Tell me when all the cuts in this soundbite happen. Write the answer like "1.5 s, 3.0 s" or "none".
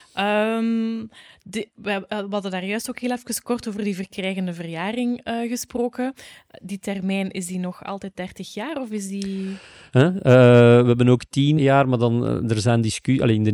9.9 s, 11.6 s